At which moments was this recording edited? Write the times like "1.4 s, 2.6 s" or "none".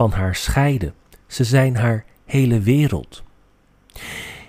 none